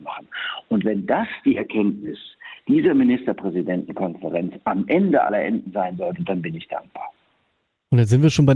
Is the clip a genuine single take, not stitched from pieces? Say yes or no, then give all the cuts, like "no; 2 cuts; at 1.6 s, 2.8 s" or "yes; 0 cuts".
yes; 0 cuts